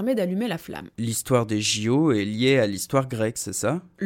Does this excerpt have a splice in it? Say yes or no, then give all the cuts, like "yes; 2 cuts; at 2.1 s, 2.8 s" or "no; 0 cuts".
yes; 1 cut; at 0.9 s